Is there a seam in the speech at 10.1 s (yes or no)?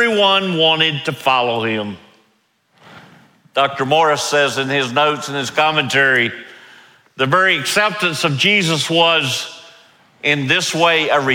no